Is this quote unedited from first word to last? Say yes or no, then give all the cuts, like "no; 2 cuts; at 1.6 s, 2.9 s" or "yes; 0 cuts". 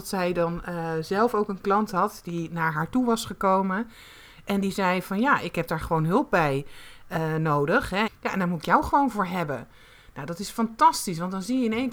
no; 1 cut; at 8.1 s